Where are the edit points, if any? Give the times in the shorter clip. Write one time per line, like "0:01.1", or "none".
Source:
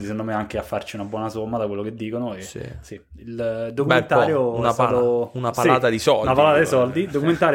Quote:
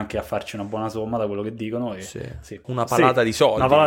0:02.6